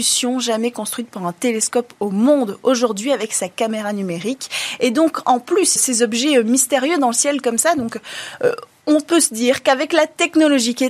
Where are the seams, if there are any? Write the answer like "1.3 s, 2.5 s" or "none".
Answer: 5.8 s